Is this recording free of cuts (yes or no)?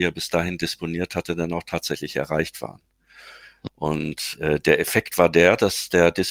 no